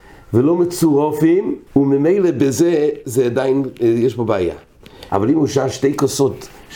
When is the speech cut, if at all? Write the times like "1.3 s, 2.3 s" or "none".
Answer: 1.7 s, 5.1 s